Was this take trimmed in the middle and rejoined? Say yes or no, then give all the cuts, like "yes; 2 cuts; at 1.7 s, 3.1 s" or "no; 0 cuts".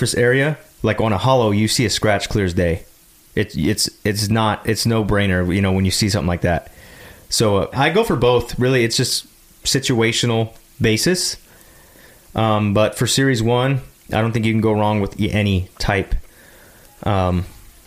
yes; 1 cut; at 7.7 s